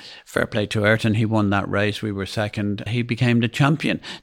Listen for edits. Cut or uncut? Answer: cut